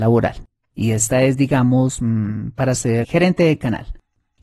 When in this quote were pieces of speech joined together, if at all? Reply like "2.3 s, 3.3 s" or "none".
3.0 s